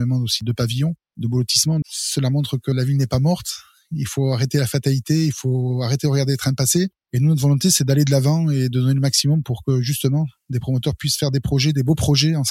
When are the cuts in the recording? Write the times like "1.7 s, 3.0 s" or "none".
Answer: 1.8 s